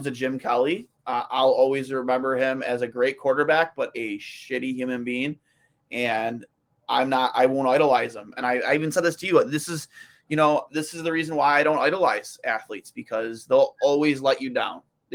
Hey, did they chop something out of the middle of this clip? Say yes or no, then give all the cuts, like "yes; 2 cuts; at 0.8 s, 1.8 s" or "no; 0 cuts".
no; 0 cuts